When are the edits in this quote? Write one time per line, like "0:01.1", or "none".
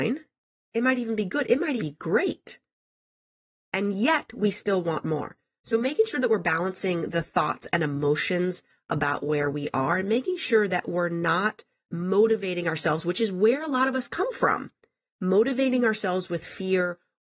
0:01.8